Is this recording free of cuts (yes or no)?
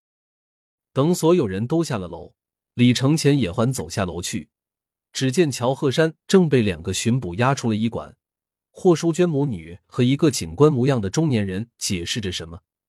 no